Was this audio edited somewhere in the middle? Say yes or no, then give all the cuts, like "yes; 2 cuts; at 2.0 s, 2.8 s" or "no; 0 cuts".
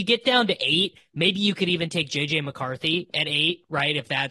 no; 0 cuts